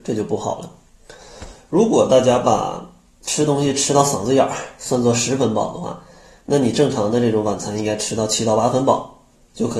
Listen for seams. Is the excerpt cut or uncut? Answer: cut